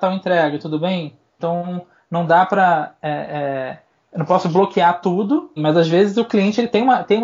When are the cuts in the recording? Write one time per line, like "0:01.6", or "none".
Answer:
0:01.4
0:05.6

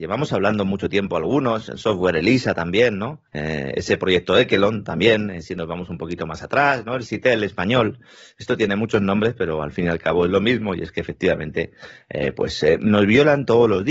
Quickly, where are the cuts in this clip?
0:03.3

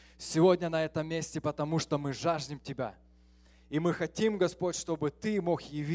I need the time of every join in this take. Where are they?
none

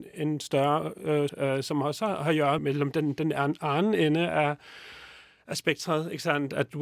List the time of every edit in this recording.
0:01.3
0:02.6

